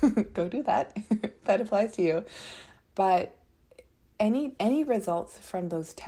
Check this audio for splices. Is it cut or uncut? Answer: cut